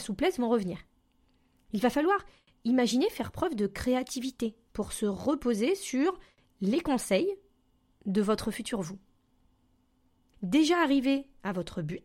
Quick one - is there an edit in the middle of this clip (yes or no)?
no